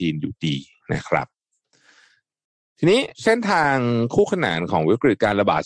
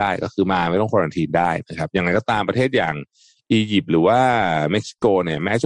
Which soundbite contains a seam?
first; 1 cut; at 3.1 s

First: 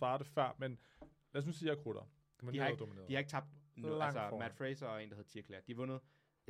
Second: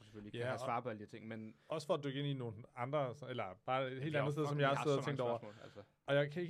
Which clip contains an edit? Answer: first; 1 cut; at 2.4 s

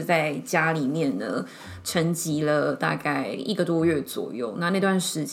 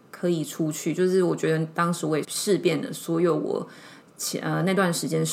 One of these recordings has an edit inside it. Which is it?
second; 1 cut; at 2.2 s

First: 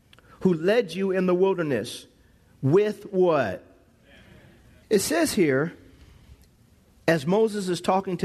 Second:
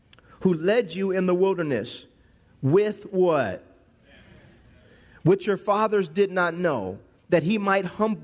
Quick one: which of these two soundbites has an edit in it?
first; 1 cut; at 4.8 s

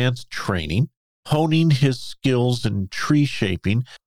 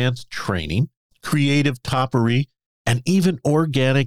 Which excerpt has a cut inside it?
second; 1 cut; at 1.1 s

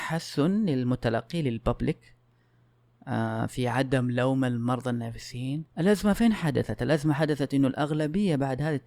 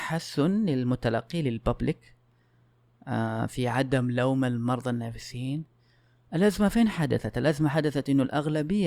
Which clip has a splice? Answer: first; 1 cut; at 5.7 s

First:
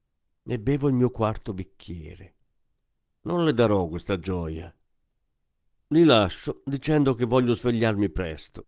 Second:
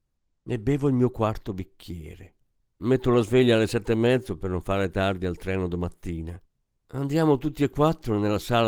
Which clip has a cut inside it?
second; 2 cuts; at 2.6 s, 6.7 s

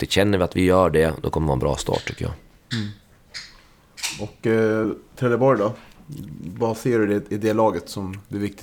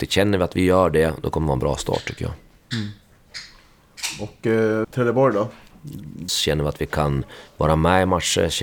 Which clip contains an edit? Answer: second; 2 cuts; at 4.8 s, 6.3 s

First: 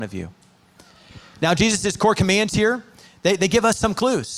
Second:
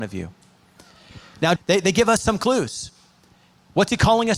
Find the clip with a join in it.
second; 1 cut; at 1.6 s

